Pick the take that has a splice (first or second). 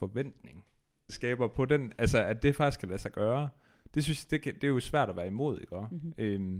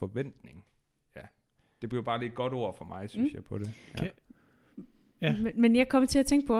first